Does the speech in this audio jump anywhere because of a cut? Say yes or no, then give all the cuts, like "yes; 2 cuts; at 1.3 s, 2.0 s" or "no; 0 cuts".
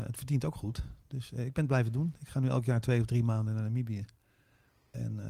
no; 0 cuts